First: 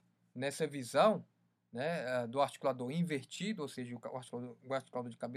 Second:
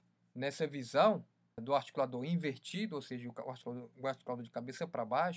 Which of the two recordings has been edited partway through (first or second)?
second